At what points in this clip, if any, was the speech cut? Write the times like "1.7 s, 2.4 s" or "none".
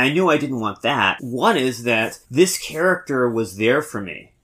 1.2 s, 2.2 s